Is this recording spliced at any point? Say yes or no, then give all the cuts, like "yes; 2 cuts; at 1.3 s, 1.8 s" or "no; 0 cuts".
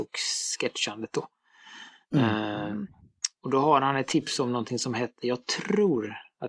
no; 0 cuts